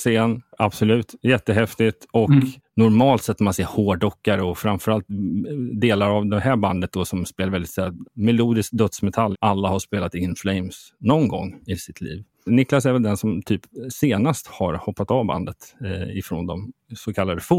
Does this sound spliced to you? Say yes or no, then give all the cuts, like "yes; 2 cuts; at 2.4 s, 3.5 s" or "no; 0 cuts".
yes; 2 cuts; at 8.0 s, 9.3 s